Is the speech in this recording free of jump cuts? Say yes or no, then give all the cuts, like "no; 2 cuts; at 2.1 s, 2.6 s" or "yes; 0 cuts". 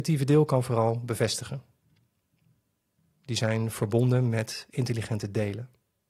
no; 1 cut; at 3.1 s